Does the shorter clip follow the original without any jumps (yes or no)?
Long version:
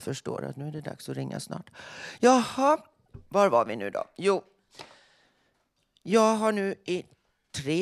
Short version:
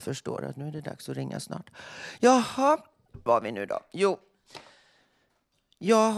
no